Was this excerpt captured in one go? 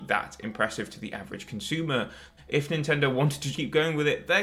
no; 2 cuts; at 2.4 s, 3.5 s

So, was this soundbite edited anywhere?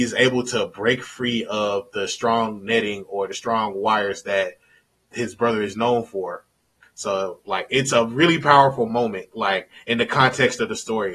yes; 1 cut; at 6.8 s

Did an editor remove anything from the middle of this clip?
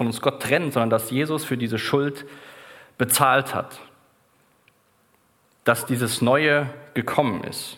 no; 0 cuts

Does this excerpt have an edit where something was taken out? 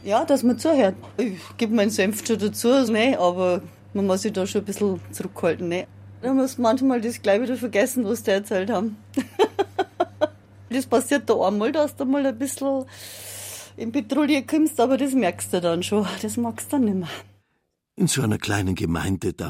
yes; 1 cut; at 2.9 s

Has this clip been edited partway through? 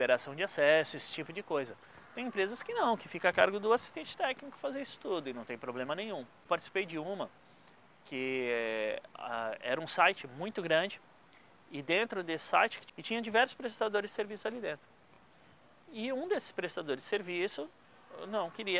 no; 0 cuts

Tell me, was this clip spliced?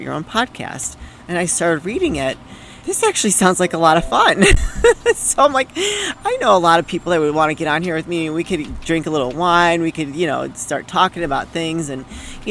yes; 1 cut; at 2.8 s

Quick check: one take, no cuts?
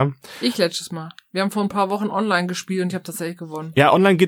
yes; 0 cuts

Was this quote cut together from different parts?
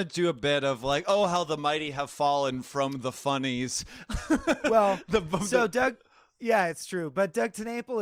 no; 0 cuts

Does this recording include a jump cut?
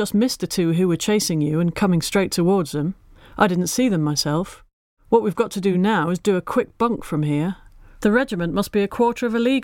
no; 0 cuts

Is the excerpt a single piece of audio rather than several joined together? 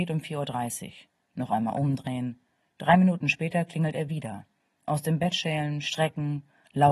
yes; 0 cuts

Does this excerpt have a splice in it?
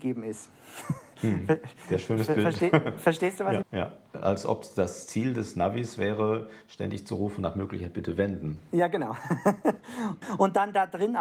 yes; 1 cut; at 3.6 s

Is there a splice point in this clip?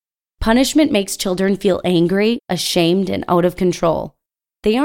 no; 0 cuts

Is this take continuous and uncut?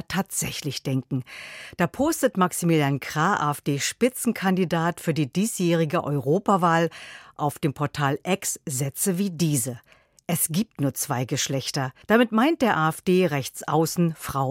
no; 1 cut; at 12.0 s

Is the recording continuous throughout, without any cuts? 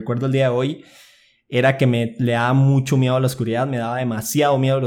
yes; 0 cuts

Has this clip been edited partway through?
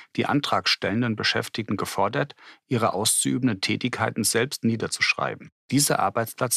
no; 0 cuts

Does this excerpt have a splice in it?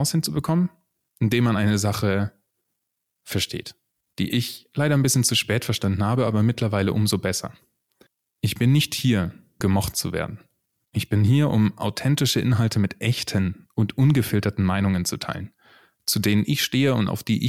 yes; 1 cut; at 9.6 s

